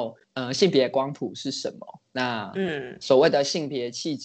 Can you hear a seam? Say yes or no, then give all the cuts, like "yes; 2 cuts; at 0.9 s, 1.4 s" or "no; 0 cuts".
no; 0 cuts